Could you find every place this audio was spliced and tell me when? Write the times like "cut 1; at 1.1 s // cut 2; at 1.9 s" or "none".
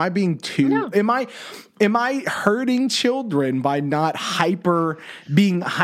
cut 1; at 0.9 s